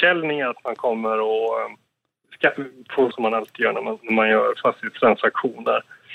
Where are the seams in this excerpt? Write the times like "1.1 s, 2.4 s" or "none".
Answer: 3.1 s